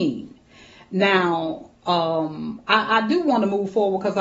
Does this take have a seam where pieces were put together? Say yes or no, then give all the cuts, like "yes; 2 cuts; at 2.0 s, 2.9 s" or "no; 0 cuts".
no; 0 cuts